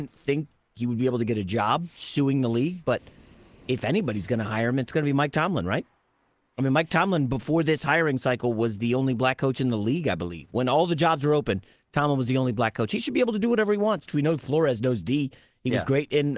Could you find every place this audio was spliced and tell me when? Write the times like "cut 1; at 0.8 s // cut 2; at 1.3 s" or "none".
cut 1; at 14.1 s